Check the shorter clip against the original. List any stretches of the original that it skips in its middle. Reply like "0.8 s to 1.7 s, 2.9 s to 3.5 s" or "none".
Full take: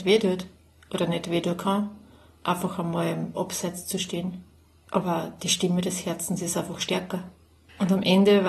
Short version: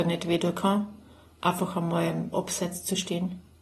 none